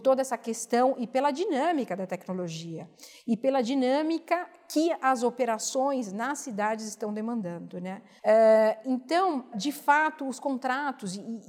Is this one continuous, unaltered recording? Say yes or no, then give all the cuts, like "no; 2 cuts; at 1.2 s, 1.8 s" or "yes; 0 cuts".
no; 2 cuts; at 8.2 s, 9.5 s